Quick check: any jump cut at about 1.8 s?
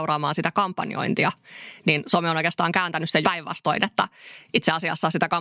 no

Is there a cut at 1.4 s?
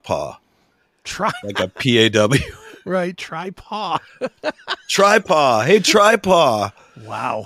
yes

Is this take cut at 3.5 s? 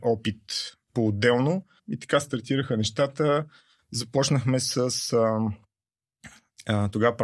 no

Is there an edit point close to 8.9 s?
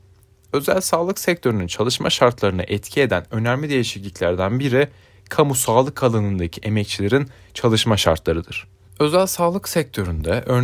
yes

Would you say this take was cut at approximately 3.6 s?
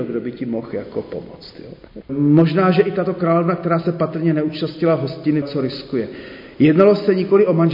no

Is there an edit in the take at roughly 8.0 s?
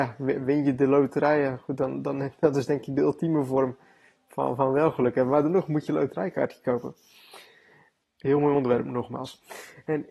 yes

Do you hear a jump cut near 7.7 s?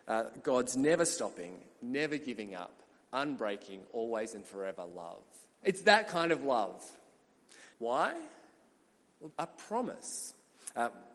yes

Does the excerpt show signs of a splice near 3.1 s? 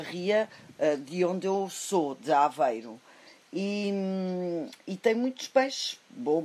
no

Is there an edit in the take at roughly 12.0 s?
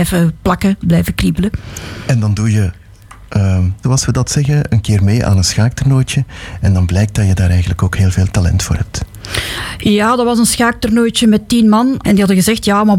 yes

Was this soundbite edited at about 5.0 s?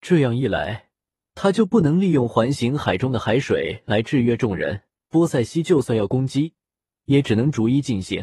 yes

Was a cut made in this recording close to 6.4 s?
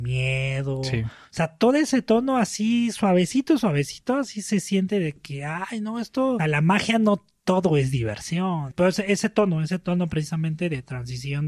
yes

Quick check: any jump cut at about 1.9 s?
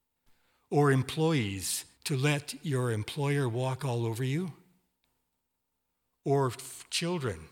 yes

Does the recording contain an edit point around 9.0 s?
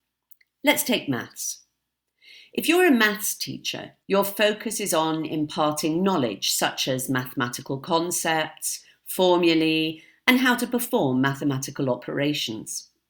no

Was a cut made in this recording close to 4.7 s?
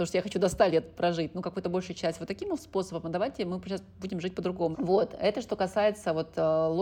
yes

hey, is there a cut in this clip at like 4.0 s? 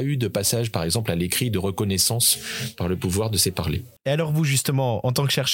yes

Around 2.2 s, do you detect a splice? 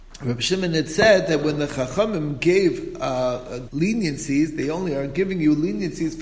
no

